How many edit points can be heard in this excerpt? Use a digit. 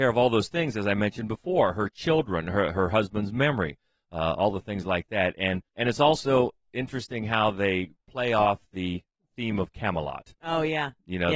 1